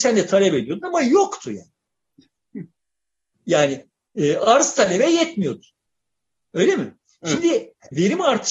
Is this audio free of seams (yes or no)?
yes